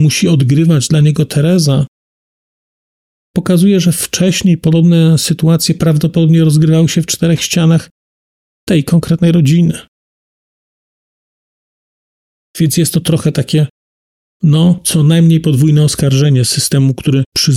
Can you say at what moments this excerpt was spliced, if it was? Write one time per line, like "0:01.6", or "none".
none